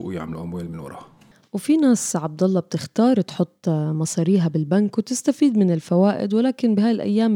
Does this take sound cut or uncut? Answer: uncut